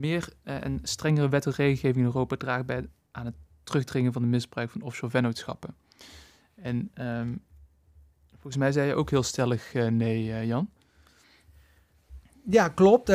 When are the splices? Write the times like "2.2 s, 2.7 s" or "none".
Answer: none

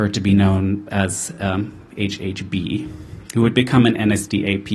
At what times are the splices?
none

